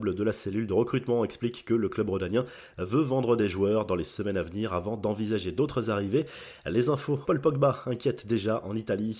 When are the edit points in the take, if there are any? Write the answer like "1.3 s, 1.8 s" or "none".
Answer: 7.2 s